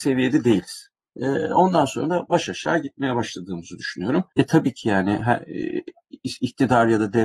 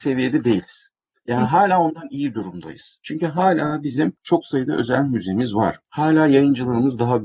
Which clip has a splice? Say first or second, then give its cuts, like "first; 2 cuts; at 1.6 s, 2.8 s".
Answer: first; 2 cuts; at 1.1 s, 4.3 s